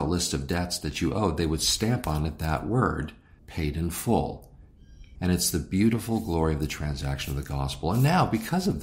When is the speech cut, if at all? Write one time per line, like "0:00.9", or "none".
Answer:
0:03.4
0:05.2